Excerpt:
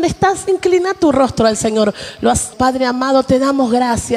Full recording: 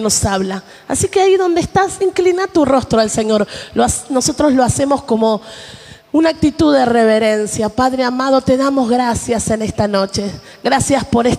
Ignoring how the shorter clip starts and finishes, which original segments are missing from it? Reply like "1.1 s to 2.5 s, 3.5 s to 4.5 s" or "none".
4.1 s to 7.7 s